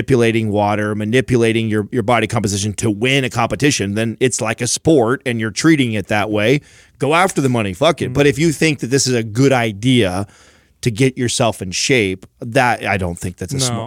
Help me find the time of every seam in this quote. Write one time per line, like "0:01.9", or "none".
none